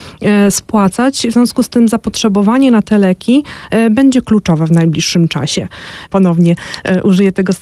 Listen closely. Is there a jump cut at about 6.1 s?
yes; 1 cut; at 6.1 s

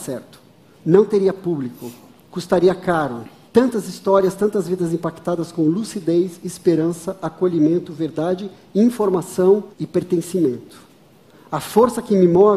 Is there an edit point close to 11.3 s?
no; 2 cuts; at 3.5 s, 9.7 s

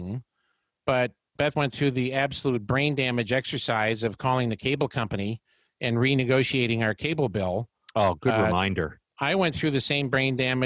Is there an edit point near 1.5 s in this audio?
yes; 2 cuts; at 1.5 s, 9.0 s

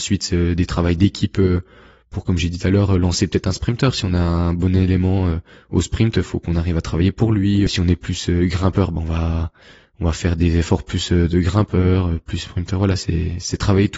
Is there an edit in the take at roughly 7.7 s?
yes; 1 cut; at 7.7 s

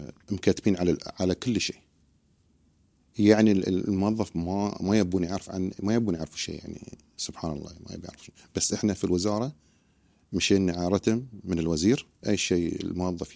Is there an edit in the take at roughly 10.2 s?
no; 1 cut; at 12.2 s

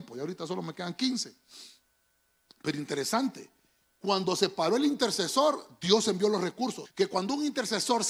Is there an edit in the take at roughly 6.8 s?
yes; 1 cut; at 6.8 s

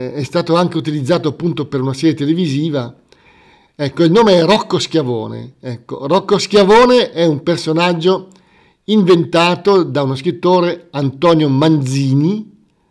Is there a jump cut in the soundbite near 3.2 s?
no; 0 cuts

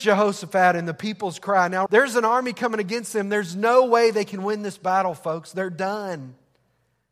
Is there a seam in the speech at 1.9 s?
yes; 1 cut; at 1.9 s

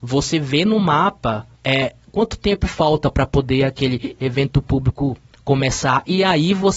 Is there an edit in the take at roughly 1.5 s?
yes; 1 cut; at 1.5 s

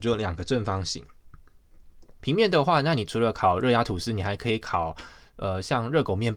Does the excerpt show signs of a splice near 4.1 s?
no; 1 cut; at 2.2 s

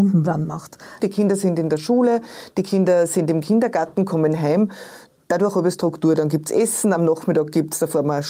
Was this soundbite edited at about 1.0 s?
yes; 1 cut; at 1.0 s

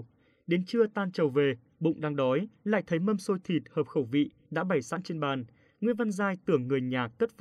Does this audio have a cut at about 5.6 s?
no; 0 cuts

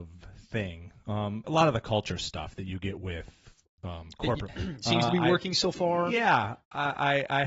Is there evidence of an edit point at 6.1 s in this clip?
no; 2 cuts; at 1.4 s, 4.5 s

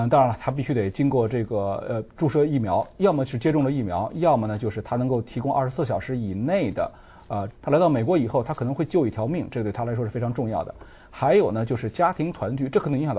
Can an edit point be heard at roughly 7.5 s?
yes; 1 cut; at 7.5 s

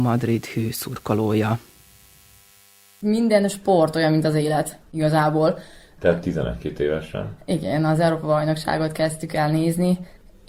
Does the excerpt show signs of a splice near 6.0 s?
yes; 1 cut; at 6.0 s

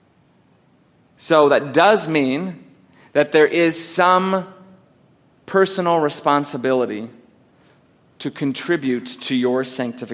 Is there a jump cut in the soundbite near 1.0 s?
no; 0 cuts

